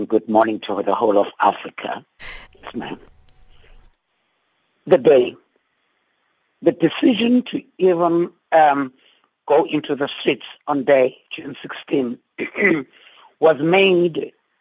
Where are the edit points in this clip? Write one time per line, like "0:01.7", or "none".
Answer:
0:02.4
0:08.4